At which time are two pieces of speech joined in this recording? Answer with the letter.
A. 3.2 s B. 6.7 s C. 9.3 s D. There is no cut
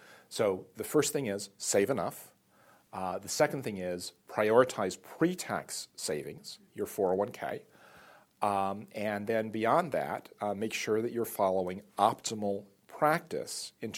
B